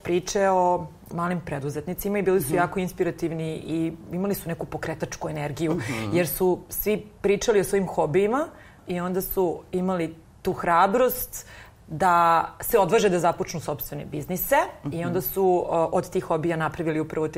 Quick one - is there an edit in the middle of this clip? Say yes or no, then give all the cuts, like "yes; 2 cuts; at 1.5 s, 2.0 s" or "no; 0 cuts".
yes; 1 cut; at 8.8 s